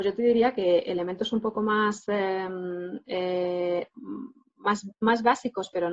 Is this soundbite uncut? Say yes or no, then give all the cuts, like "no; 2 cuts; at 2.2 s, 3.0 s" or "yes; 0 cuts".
yes; 0 cuts